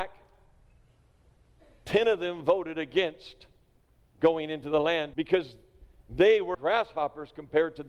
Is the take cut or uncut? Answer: cut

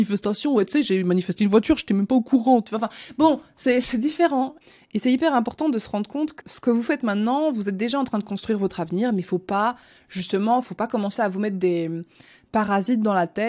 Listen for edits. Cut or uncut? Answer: cut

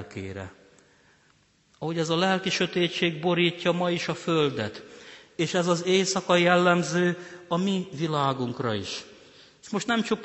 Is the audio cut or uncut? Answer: uncut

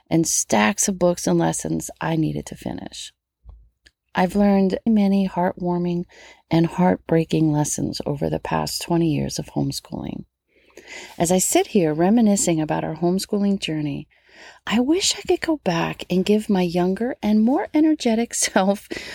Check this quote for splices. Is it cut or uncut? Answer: cut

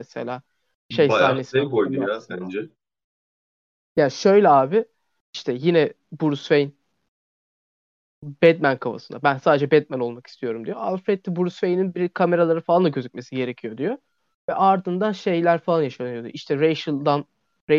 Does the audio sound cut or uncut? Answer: uncut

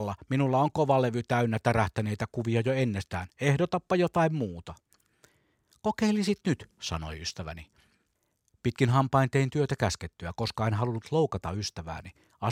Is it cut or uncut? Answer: uncut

